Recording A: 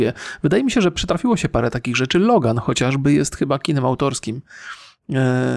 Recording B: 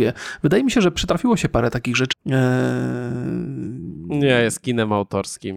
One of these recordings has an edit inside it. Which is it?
B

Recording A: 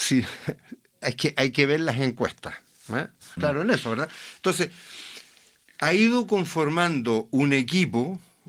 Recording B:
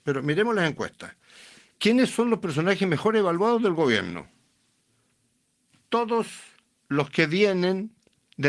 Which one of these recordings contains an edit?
A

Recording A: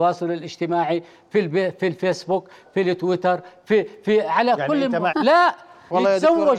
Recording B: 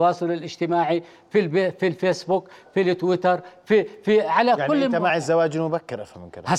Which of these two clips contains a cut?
A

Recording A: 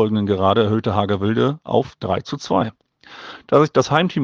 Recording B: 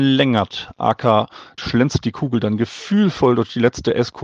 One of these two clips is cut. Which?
B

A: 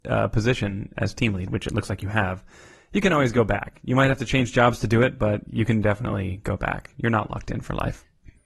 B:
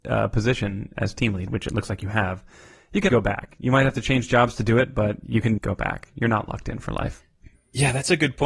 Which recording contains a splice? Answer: B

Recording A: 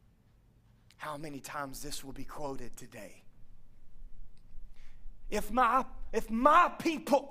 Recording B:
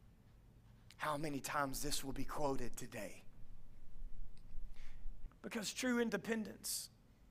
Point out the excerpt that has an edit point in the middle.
B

